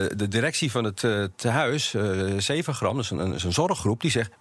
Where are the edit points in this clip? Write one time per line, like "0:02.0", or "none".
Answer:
none